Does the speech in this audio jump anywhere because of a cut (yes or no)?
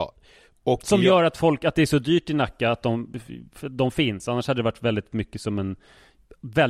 no